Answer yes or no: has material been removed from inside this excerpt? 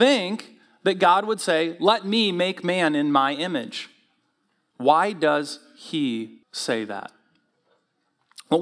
yes